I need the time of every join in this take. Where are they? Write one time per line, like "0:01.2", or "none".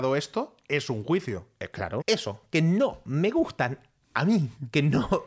0:02.0